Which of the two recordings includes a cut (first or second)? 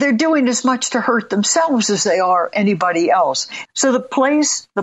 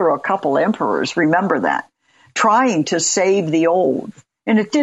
first